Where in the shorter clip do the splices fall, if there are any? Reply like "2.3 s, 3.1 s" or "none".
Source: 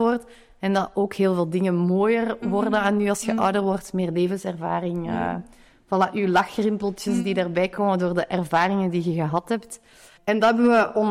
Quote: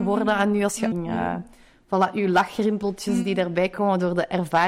0.9 s

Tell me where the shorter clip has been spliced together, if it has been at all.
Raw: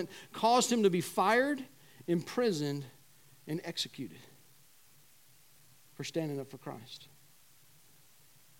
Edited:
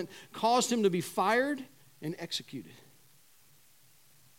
1.8 s

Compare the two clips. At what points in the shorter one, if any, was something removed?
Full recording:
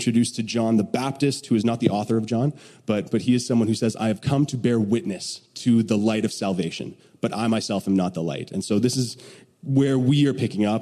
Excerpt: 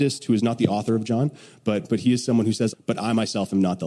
2.7 s

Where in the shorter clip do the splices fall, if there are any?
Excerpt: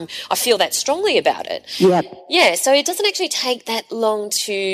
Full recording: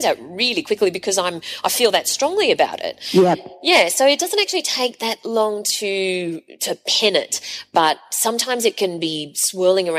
none

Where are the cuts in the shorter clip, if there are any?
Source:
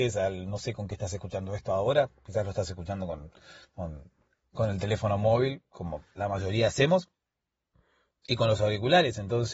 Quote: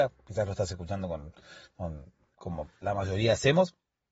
2.3 s

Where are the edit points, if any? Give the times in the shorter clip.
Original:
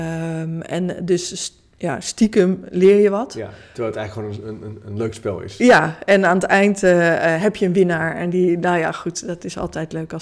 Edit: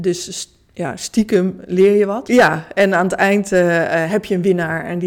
2.3 s

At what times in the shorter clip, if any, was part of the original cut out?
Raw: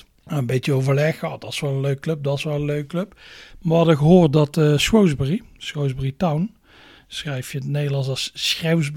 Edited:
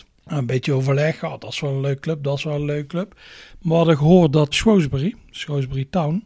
4.5 s

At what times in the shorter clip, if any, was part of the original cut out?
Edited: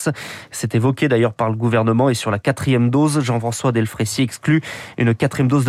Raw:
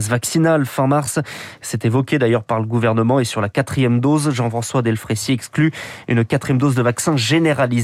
none

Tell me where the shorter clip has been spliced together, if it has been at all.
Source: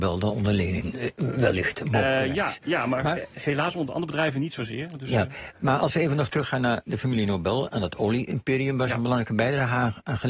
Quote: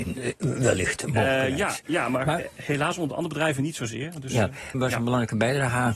4.7 s

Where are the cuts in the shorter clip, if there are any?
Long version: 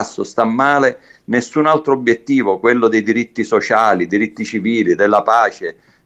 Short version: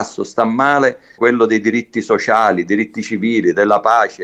1.2 s

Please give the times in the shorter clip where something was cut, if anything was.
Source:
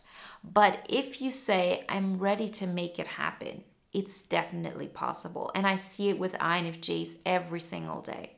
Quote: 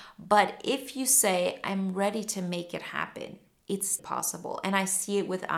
4.0 s

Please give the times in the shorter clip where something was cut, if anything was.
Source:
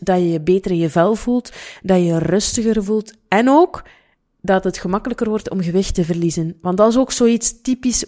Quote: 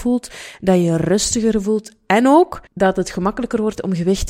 2.7 s

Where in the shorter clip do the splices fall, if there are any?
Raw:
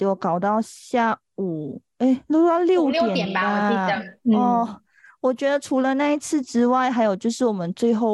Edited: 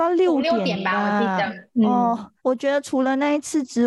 2.4 s

